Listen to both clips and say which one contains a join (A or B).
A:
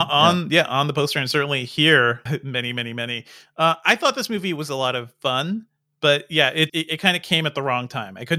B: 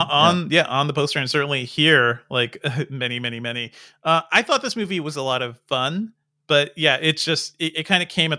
A